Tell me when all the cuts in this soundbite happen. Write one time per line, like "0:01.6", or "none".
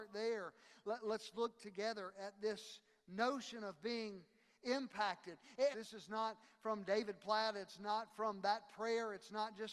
0:05.7